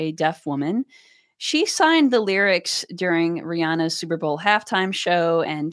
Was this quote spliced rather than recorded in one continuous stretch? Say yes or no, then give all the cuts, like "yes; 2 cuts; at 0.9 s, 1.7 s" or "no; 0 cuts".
no; 0 cuts